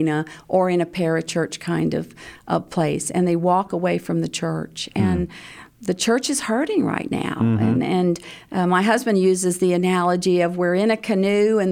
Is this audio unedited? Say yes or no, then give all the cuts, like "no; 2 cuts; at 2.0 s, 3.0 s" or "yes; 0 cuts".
yes; 0 cuts